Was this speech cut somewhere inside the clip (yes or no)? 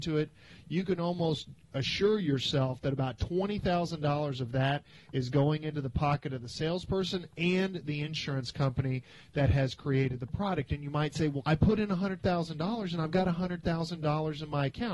yes